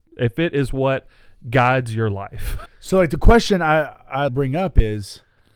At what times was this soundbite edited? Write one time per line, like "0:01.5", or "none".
0:02.7
0:04.3